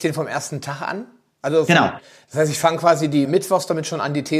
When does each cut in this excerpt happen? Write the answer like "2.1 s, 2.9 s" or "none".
1.7 s, 3.2 s